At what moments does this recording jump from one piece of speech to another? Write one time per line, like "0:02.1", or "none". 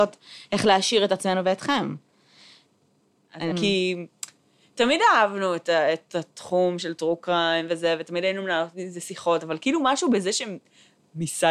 0:03.5